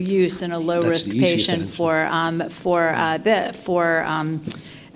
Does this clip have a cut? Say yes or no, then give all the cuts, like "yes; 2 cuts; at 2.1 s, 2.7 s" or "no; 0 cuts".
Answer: no; 0 cuts